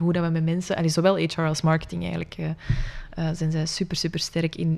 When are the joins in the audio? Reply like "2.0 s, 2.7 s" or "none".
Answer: none